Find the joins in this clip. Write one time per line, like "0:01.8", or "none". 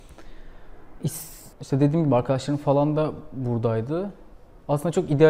0:01.5